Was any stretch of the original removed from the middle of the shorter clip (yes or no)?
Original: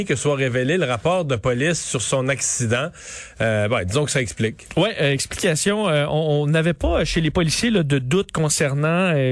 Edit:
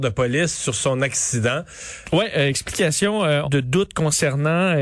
yes